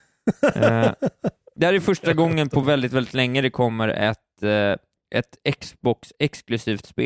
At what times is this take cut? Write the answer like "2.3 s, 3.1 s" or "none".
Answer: none

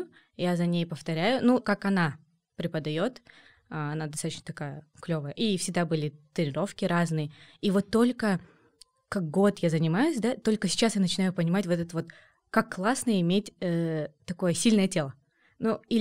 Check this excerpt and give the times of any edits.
1.6 s

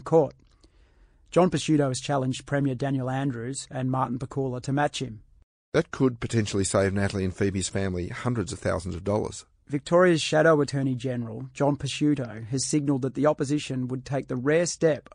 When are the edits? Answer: 9.6 s

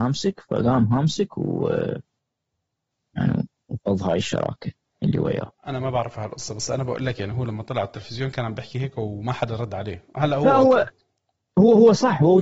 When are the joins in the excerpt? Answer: none

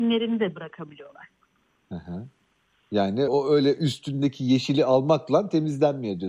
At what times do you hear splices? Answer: 3.3 s

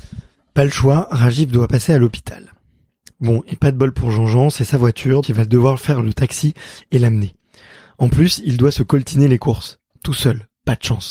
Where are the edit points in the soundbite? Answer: 5.2 s

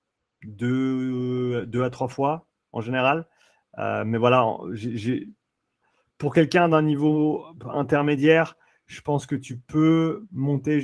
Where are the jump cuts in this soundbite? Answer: none

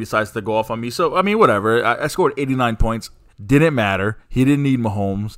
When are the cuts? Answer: 3.3 s

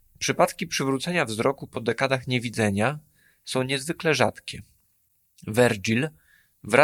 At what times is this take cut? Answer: none

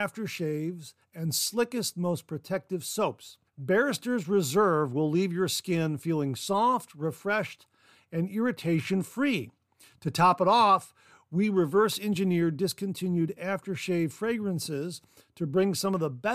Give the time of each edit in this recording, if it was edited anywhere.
3.5 s

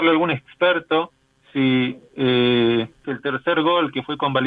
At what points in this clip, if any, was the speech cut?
3.0 s

